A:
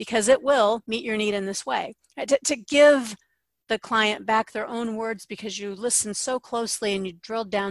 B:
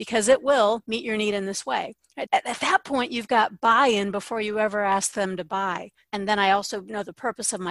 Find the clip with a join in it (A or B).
B